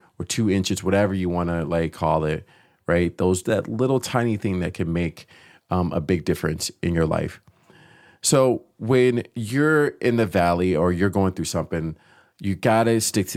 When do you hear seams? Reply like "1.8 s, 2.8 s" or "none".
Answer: 3.4 s